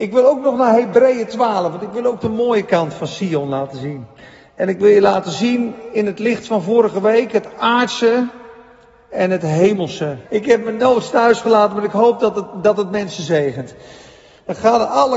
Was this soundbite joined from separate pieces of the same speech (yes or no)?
yes